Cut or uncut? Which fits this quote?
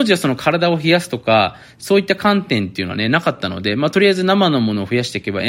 uncut